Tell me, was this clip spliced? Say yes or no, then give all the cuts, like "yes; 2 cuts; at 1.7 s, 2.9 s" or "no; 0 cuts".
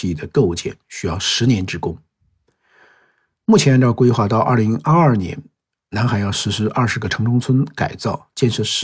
no; 0 cuts